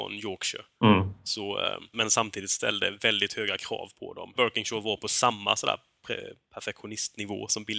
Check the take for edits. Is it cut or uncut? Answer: cut